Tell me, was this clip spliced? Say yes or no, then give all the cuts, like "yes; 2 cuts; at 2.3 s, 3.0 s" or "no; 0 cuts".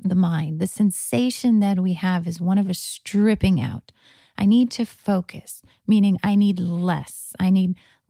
no; 0 cuts